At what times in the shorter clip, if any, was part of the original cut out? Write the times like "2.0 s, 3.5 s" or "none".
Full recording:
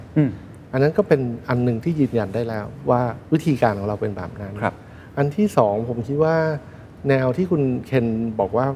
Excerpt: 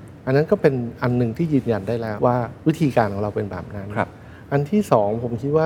2.2 s